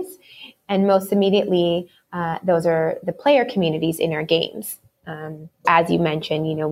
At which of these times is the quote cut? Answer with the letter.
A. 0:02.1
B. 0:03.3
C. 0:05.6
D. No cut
C